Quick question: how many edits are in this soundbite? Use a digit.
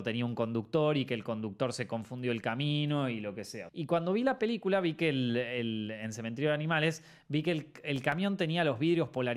1